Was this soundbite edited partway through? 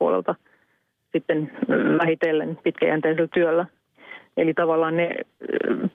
no; 0 cuts

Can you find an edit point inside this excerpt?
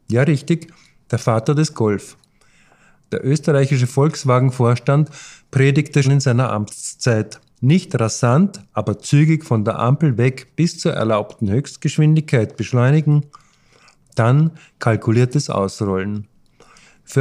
yes; 2 cuts; at 6.0 s, 7.5 s

